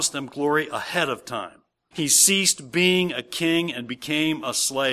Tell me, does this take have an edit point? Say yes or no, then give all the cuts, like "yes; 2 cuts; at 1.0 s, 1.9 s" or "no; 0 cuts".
yes; 1 cut; at 1.9 s